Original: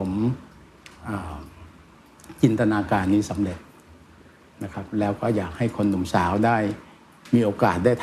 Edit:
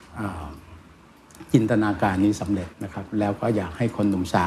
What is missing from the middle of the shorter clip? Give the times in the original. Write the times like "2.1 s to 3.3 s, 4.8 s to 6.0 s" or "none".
3.6 s to 4.5 s